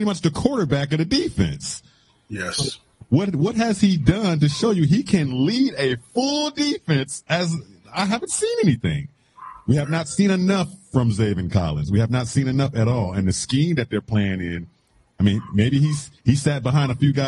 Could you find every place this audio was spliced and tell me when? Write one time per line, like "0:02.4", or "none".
none